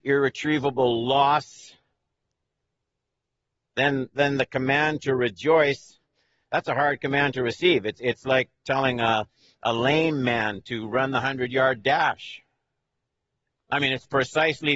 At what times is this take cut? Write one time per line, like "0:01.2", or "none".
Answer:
none